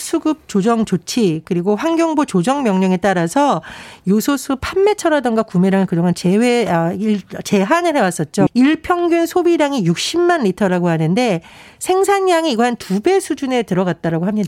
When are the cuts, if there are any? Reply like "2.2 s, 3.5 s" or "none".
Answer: 8.5 s